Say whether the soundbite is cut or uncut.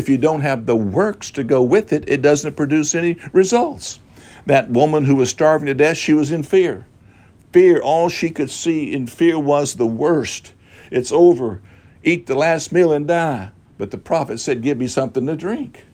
uncut